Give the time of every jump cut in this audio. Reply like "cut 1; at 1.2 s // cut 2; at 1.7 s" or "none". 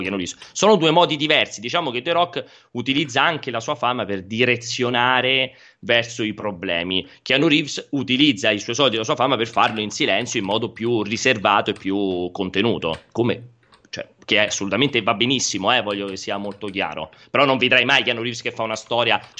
none